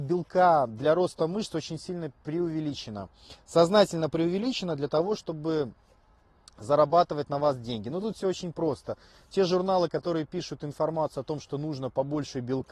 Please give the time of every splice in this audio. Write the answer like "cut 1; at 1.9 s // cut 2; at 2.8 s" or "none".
none